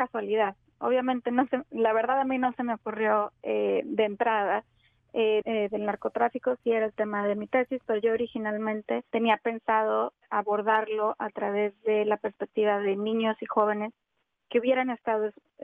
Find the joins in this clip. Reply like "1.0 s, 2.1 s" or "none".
5.4 s, 6.6 s, 9.1 s